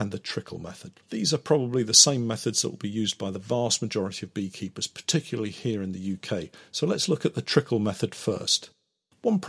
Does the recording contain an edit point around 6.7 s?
no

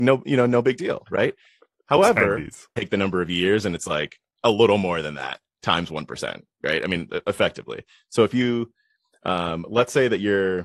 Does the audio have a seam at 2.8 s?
yes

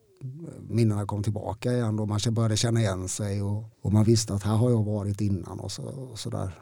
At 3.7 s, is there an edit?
yes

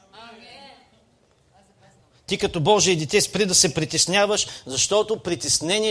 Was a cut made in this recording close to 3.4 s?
no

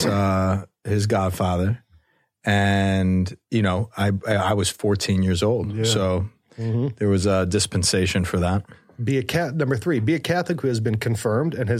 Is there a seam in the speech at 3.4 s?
yes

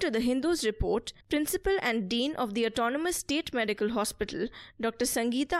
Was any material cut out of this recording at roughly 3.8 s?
no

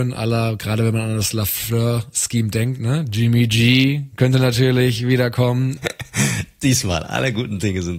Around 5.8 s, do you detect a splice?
yes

